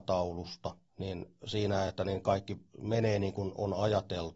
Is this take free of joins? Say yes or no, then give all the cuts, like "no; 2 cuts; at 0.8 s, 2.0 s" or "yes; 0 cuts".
yes; 0 cuts